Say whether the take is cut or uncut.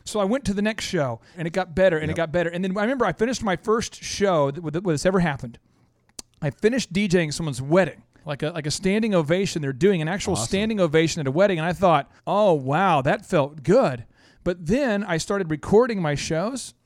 cut